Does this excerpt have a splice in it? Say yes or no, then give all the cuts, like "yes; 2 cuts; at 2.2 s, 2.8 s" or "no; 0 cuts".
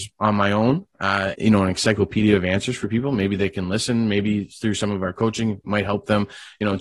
yes; 1 cut; at 1.3 s